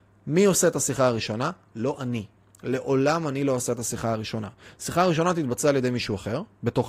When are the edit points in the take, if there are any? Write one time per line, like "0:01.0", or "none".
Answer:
none